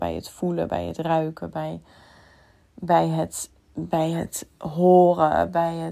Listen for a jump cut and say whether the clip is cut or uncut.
uncut